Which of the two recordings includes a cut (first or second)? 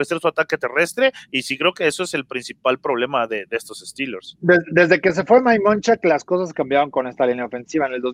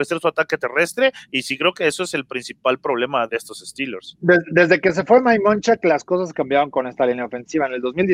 second